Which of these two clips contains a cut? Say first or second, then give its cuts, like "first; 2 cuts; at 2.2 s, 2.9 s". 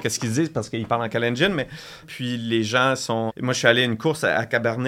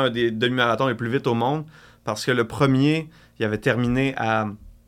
first; 2 cuts; at 2.0 s, 3.3 s